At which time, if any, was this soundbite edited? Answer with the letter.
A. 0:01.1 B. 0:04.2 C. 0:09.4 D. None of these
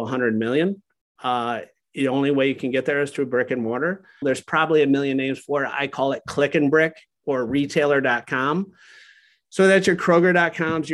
B